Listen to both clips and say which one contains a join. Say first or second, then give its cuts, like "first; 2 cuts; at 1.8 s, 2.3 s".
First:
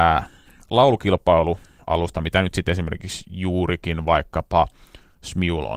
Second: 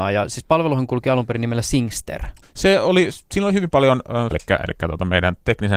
second; 2 cuts; at 2.4 s, 4.3 s